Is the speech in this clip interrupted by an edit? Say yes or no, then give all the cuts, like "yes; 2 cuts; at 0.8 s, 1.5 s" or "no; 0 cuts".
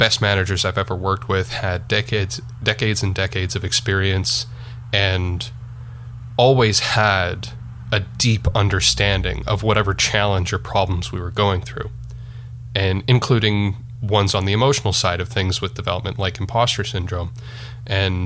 no; 0 cuts